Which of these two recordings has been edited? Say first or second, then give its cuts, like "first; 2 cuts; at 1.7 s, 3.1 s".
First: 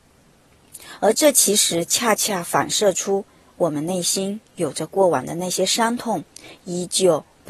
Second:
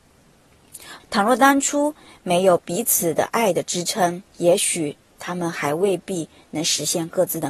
second; 2 cuts; at 1.0 s, 4.3 s